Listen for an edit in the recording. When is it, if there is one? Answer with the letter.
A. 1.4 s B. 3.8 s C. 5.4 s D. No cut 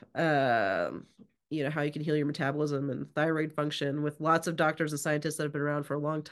A